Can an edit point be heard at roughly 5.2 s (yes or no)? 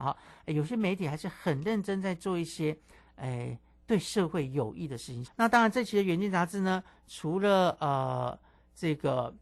yes